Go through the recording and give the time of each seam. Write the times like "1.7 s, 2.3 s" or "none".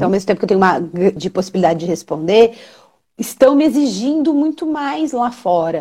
1.2 s